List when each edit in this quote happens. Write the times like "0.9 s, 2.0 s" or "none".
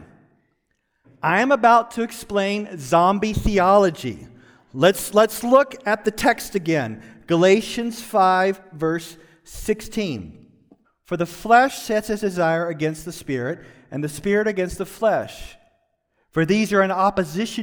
1.0 s, 10.8 s